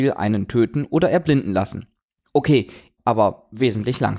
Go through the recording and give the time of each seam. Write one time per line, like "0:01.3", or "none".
0:03.0